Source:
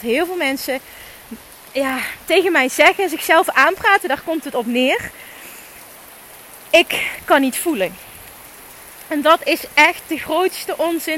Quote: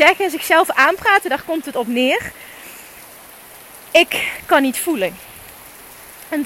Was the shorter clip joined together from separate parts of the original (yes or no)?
no